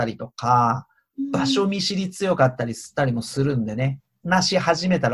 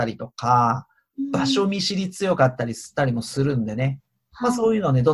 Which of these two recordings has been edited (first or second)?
first